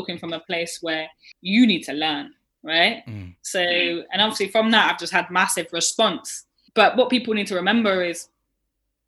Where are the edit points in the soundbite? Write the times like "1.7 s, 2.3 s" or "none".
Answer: none